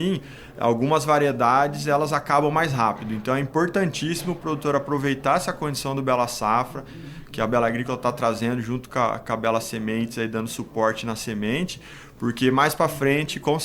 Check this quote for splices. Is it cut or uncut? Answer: uncut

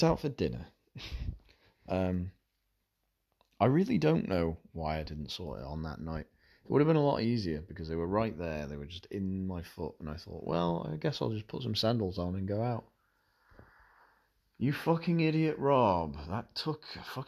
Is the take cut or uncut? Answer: uncut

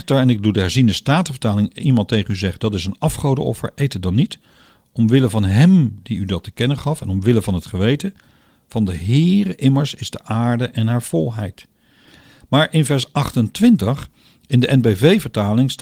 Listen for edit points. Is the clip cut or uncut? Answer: uncut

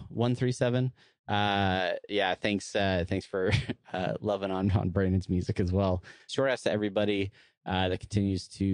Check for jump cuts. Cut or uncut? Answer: cut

